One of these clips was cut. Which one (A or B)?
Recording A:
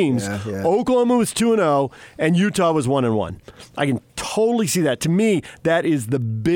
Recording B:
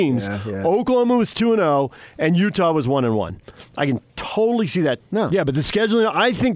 B